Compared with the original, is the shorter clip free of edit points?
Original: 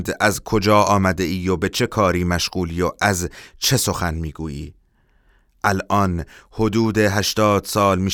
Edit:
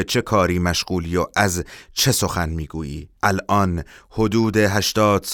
no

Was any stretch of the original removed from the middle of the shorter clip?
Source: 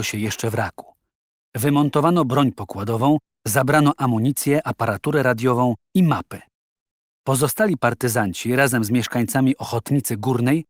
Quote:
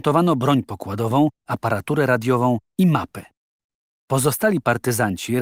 yes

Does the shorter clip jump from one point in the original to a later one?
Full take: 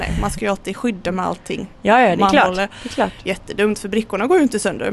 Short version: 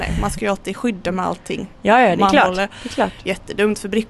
no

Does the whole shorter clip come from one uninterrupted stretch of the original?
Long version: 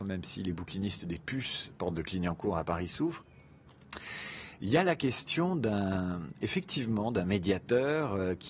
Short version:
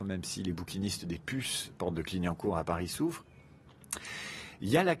yes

